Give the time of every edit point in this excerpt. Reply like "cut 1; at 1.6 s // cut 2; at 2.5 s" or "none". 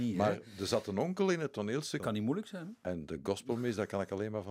cut 1; at 2.0 s